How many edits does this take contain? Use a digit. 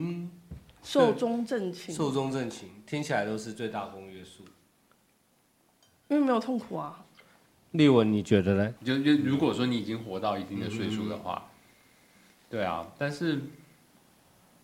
1